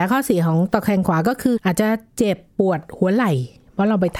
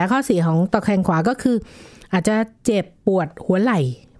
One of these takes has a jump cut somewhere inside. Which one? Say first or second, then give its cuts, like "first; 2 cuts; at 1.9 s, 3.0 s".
first; 1 cut; at 1.6 s